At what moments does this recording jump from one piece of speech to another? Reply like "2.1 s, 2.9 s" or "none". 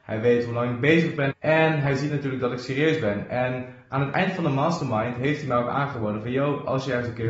1.3 s

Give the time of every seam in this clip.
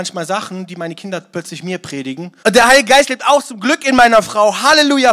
2.4 s

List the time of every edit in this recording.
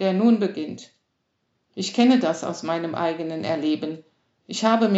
none

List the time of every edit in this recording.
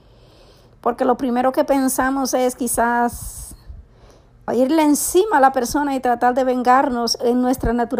4.5 s

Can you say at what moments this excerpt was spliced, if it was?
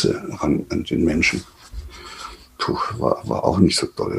none

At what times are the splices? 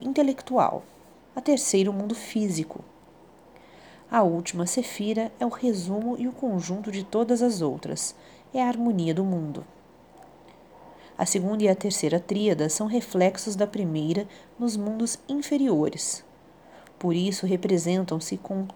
1.2 s

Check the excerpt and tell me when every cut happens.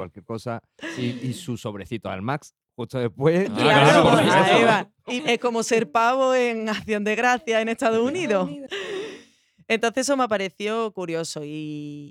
5.2 s, 8.7 s

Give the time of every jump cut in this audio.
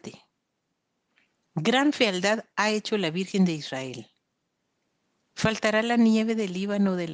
none

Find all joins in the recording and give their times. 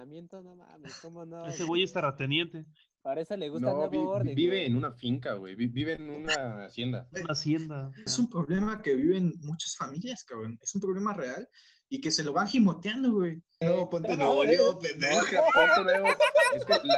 8.1 s, 13.6 s

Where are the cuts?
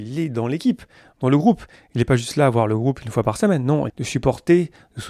3.9 s

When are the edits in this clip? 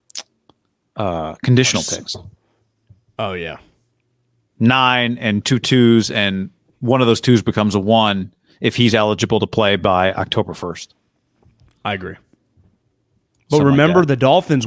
none

